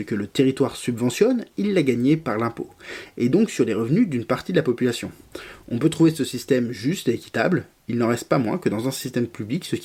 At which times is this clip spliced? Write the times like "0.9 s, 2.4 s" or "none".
none